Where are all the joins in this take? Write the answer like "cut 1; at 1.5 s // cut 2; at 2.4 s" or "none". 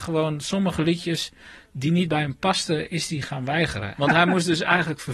cut 1; at 4.0 s